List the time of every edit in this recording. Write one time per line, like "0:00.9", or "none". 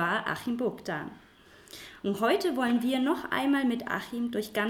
none